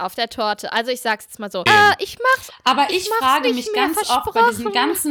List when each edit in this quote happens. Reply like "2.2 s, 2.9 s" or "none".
1.7 s